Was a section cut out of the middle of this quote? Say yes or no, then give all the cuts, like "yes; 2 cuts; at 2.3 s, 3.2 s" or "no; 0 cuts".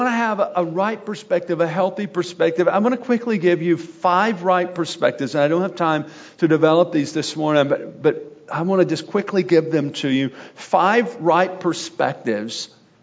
no; 0 cuts